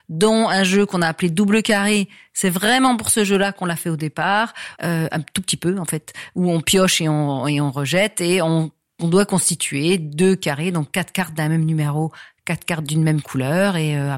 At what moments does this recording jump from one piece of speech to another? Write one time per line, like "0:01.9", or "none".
0:04.8